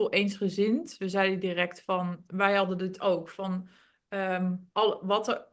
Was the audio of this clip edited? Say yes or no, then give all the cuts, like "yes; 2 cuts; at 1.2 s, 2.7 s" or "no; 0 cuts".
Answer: no; 0 cuts